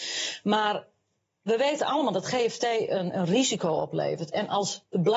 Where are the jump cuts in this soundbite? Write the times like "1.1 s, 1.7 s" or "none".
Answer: none